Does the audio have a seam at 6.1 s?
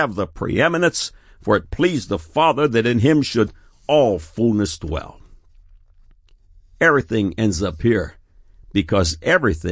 no; 0 cuts

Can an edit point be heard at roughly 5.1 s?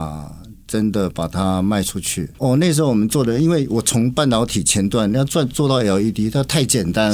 no; 1 cut; at 2.3 s

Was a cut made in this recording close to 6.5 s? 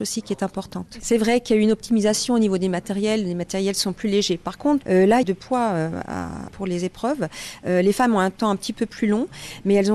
yes; 2 cuts; at 5.2 s, 6.5 s

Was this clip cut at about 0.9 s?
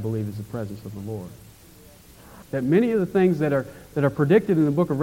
no; 1 cut; at 2.4 s

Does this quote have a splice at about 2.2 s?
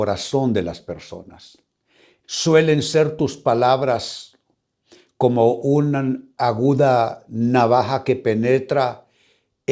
yes; 1 cut; at 2.2 s

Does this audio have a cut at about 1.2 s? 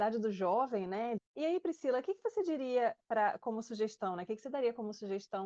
yes; 1 cut; at 1.2 s

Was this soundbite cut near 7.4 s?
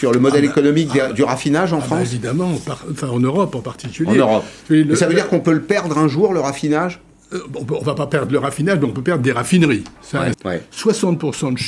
no; 1 cut; at 10.3 s

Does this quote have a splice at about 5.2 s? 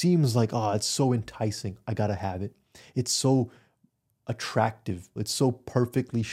yes; 1 cut; at 5.2 s

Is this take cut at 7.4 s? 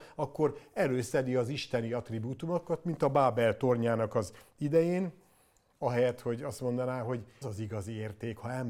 yes; 1 cut; at 7.4 s

